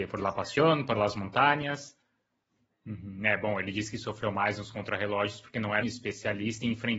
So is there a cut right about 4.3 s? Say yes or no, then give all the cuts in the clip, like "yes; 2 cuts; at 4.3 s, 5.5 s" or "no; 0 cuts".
no; 2 cuts; at 2.7 s, 5.8 s